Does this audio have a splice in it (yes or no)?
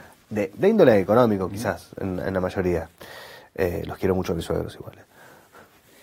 no